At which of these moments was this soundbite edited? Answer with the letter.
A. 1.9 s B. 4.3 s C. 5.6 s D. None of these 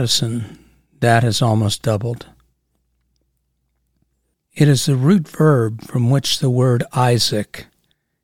B